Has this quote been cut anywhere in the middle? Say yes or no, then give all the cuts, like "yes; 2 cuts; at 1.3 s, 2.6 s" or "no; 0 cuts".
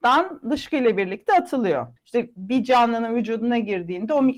yes; 1 cut; at 2.0 s